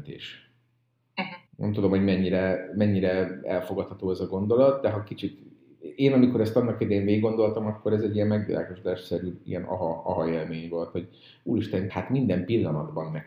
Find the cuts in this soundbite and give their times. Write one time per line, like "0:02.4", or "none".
0:01.5
0:11.9